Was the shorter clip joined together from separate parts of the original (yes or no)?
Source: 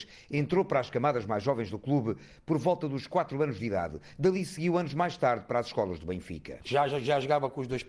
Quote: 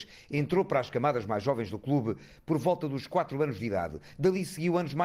no